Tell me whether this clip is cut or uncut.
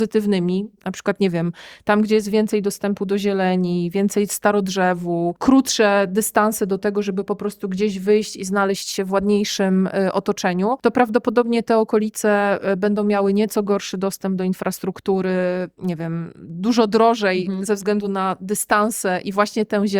uncut